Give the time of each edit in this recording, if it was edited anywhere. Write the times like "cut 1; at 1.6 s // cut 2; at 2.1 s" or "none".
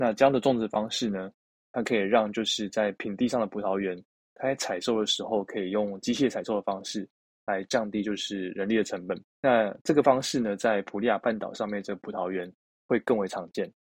cut 1; at 9.3 s